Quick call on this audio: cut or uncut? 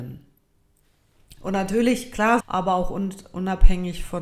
cut